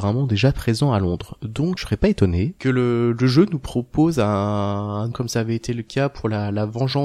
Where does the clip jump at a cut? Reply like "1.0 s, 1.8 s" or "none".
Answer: 1.8 s, 5.1 s